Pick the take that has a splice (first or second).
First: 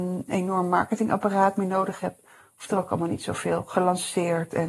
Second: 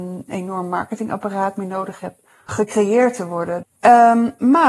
second